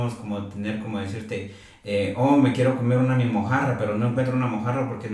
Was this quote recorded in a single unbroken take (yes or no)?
yes